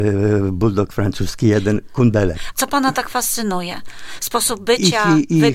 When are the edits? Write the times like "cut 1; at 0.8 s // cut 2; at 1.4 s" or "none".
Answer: cut 1; at 2.5 s